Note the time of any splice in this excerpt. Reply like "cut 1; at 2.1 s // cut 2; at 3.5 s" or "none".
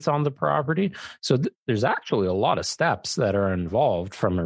none